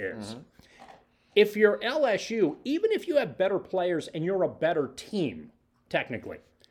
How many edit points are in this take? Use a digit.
0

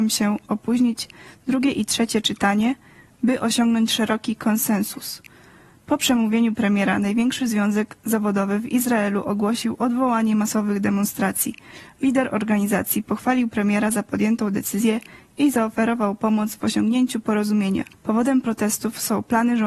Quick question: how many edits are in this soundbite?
1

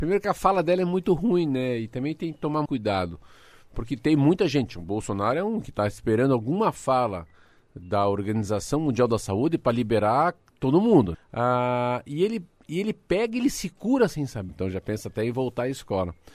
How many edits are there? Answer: 3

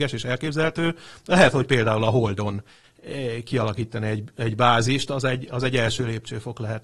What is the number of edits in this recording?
0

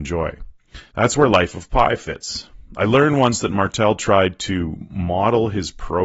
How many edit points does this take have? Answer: 1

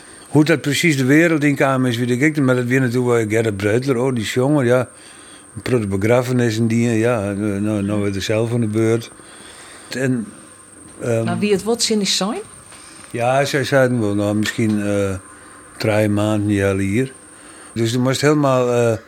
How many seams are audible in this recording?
2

